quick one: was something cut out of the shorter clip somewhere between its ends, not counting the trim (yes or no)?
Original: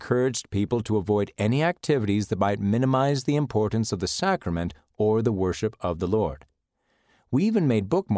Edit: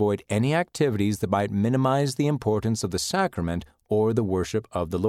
no